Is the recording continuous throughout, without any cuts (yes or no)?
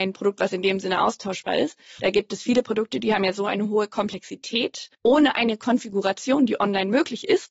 no